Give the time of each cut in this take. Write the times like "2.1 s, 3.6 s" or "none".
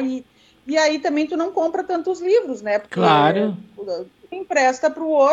4.3 s